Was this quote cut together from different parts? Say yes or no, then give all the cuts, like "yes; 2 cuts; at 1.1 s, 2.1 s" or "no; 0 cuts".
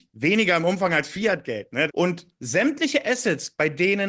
yes; 1 cut; at 1.9 s